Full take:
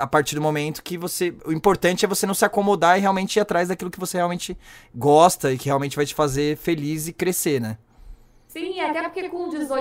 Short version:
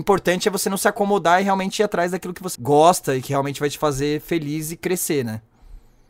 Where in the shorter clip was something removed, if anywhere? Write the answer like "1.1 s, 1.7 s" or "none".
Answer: 2.6 s

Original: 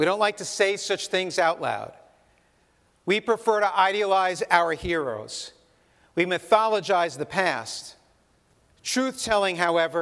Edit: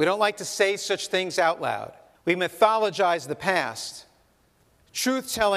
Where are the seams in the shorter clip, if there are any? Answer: 2.1 s

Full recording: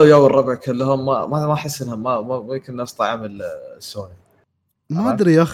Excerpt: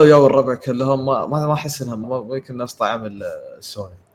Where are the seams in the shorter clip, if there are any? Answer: 2.0 s

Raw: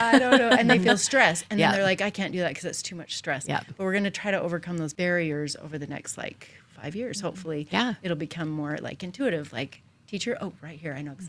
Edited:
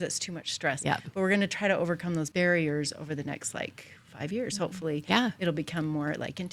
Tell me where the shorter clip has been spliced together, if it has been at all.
none

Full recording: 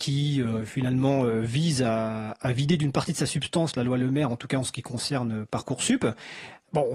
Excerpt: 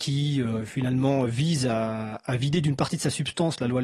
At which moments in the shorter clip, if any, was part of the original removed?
1.3 s

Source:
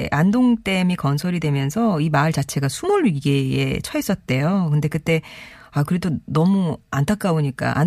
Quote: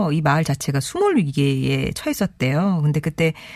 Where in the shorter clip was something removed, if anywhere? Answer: none

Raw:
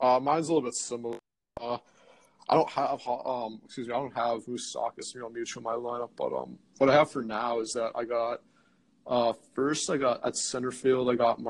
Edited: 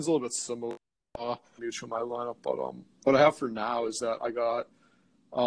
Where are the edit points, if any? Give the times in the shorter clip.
1.6 s

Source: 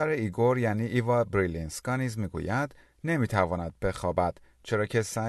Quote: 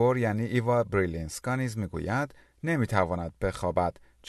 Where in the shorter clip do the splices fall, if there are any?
none

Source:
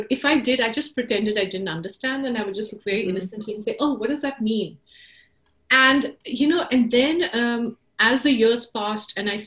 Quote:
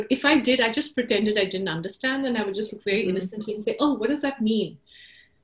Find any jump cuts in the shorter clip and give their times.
none

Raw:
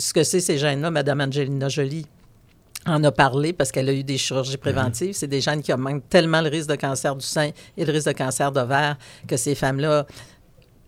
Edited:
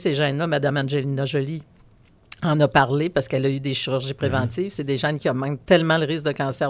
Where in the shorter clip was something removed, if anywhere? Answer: none

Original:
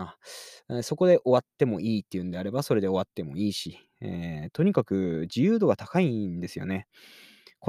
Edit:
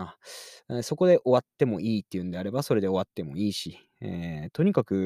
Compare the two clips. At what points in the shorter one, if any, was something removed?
none

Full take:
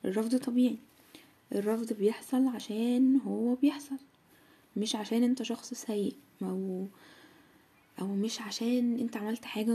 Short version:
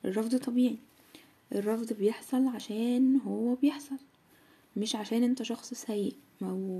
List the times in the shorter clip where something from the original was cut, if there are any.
none

